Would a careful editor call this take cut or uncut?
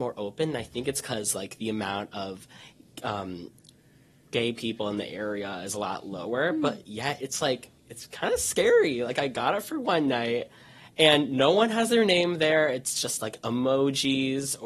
uncut